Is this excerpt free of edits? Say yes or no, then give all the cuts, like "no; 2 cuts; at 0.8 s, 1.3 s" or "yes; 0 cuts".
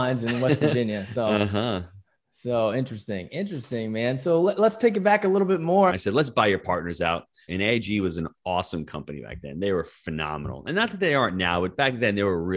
no; 2 cuts; at 5.9 s, 7.5 s